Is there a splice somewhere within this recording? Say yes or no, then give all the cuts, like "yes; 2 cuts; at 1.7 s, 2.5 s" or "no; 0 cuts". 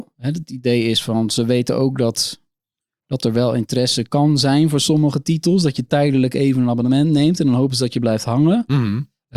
no; 0 cuts